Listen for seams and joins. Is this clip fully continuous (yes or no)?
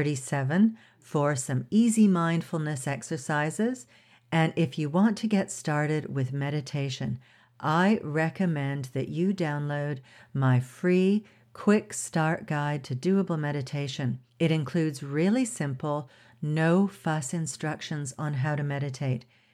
no